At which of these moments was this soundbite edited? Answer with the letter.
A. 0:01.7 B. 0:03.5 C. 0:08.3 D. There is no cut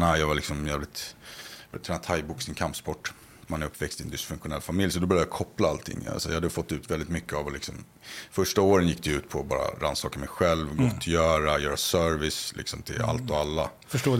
B